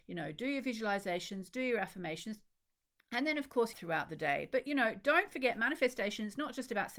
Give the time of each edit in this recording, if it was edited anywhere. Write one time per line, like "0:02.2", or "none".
0:03.7

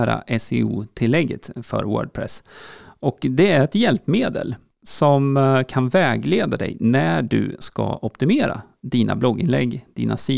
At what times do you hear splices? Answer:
none

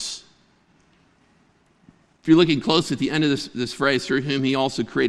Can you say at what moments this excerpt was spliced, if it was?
none

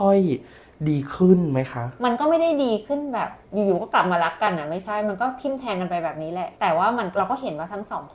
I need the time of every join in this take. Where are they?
0:03.4
0:06.5

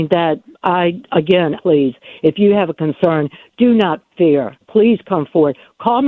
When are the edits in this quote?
0:01.6
0:04.6

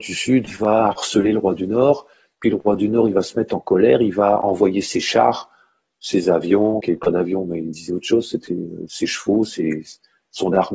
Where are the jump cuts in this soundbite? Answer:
0:06.8

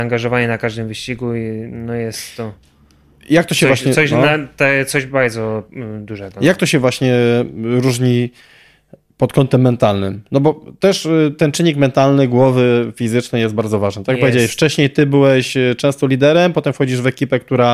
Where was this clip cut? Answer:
none

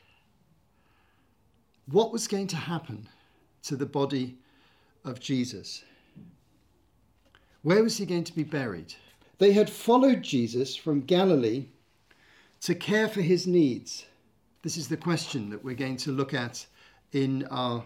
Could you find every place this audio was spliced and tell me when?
0:09.2
0:14.6

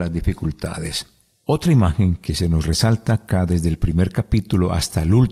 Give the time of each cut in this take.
none

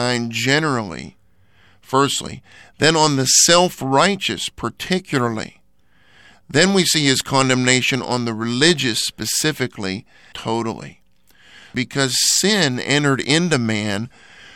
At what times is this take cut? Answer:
0:10.3

